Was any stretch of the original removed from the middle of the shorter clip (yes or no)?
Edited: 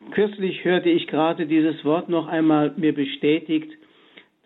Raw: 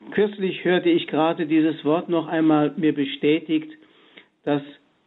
no